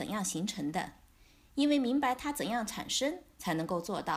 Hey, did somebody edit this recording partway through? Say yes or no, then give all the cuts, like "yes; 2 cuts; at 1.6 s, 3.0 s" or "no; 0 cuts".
no; 0 cuts